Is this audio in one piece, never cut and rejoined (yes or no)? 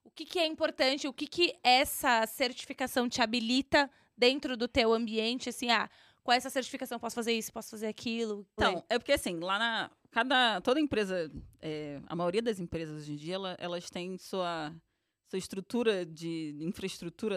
no